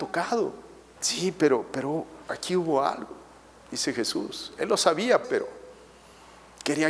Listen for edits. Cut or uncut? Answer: cut